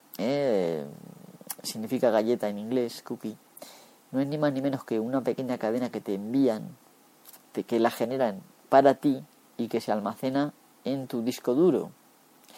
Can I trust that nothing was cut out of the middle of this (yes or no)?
yes